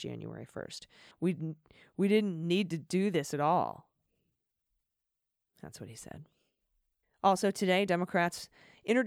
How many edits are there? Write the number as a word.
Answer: two